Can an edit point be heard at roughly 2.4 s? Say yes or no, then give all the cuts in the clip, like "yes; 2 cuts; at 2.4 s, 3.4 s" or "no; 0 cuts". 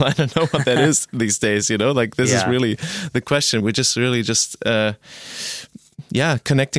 no; 1 cut; at 3.6 s